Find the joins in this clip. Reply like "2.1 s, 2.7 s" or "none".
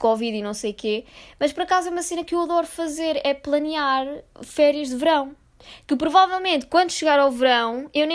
none